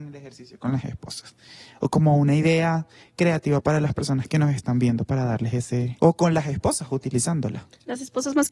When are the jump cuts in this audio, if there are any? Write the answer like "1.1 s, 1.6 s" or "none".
6.0 s